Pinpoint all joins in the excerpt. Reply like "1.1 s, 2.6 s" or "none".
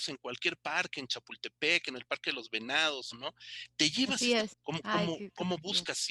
3.1 s, 4.5 s